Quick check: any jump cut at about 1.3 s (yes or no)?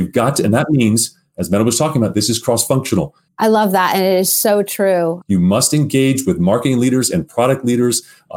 no